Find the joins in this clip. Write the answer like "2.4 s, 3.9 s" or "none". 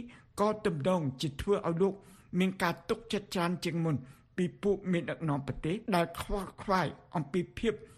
5.9 s